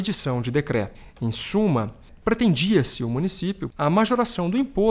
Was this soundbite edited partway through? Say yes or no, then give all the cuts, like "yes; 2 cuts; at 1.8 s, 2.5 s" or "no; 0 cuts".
no; 0 cuts